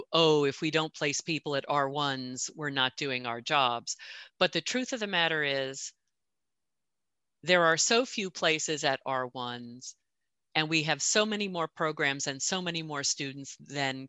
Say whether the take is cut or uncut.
uncut